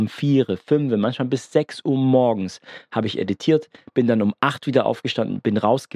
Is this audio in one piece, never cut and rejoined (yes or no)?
yes